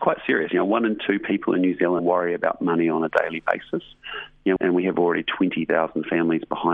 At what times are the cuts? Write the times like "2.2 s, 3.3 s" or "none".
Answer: 2.0 s, 4.6 s